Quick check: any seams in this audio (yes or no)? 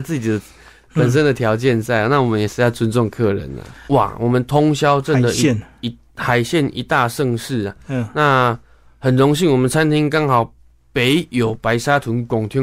yes